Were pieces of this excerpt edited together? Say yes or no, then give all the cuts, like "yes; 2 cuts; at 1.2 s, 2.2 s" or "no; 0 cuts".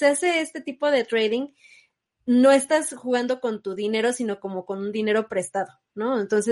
no; 0 cuts